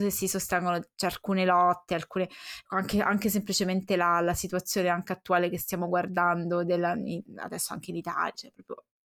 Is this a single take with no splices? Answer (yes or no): yes